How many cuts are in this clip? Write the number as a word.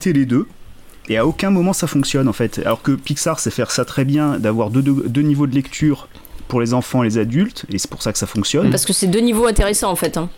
zero